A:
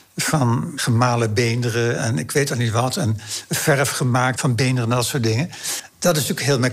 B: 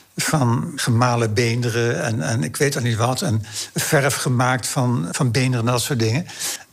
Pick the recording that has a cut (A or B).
A